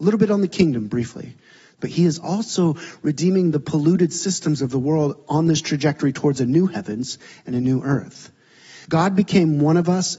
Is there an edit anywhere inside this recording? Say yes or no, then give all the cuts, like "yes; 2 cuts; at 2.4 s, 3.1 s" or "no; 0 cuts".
yes; 2 cuts; at 1.8 s, 8.8 s